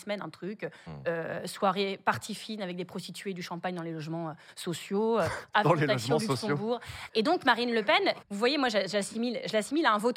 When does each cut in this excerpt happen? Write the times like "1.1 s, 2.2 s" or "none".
7.1 s, 8.2 s